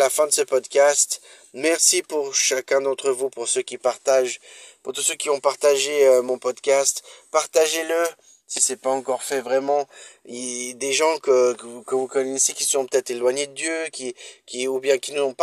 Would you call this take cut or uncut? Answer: uncut